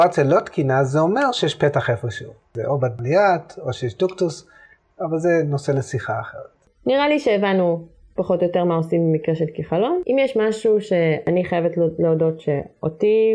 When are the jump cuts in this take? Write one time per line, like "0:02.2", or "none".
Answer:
none